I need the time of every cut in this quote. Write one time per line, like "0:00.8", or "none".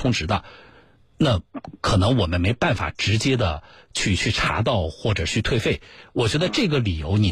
none

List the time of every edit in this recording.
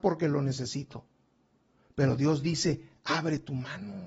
none

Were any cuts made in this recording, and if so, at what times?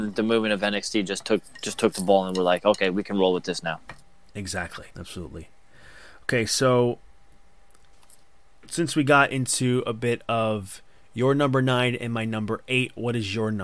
0:04.9

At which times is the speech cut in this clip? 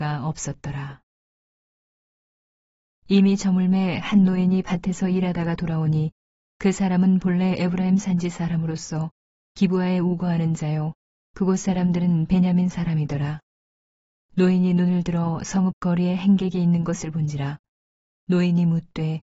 none

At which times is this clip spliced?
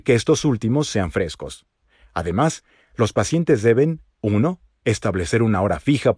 none

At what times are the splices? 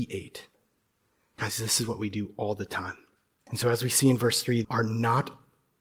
0:03.5
0:04.6

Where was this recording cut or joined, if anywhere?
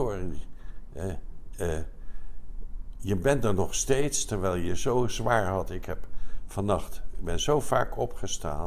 none

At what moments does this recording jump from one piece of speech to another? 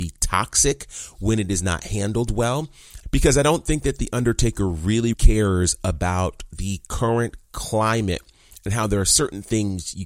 0:03.0
0:05.1

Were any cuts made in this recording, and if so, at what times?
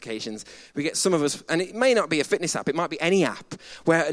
none

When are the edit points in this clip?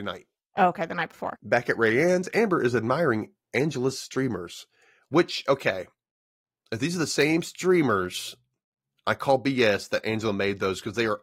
0:01.4

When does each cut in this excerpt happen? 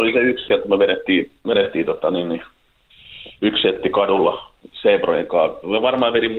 none

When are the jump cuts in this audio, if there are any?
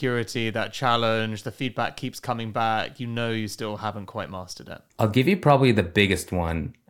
0:04.9

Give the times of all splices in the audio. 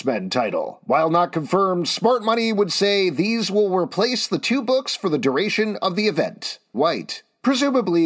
0:06.7

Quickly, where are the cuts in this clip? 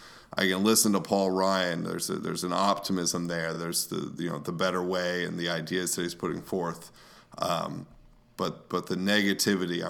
none

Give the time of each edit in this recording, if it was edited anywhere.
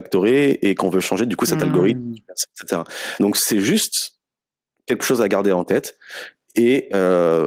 none

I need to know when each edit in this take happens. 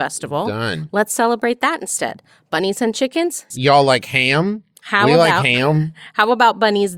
0:03.5

